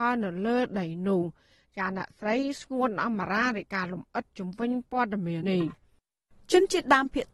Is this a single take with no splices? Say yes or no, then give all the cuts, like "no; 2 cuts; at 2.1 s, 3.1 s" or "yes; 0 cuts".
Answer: no; 1 cut; at 5.4 s